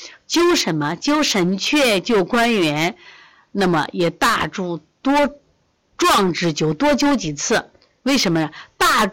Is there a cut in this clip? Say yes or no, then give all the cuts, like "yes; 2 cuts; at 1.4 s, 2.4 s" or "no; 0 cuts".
no; 0 cuts